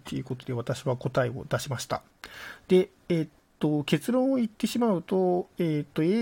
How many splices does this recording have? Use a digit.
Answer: 0